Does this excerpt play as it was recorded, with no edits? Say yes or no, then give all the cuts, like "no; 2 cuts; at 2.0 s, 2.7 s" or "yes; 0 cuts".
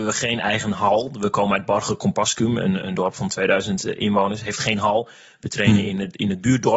yes; 0 cuts